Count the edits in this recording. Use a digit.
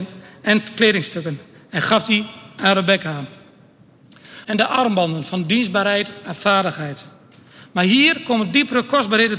1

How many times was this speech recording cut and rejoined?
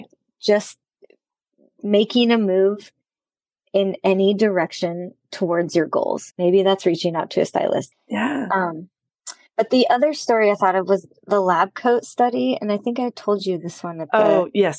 2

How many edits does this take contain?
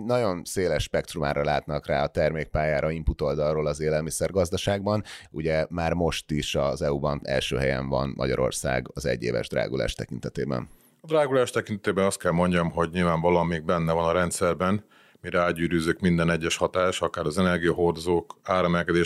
1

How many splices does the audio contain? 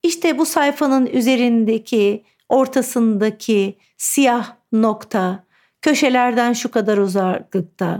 0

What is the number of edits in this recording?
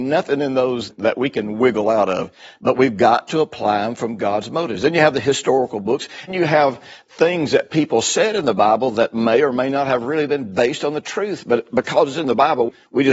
1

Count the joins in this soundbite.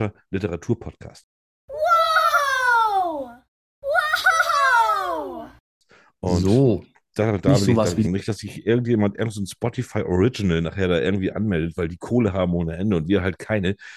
1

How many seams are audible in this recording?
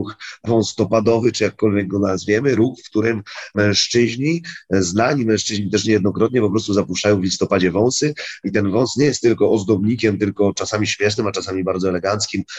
0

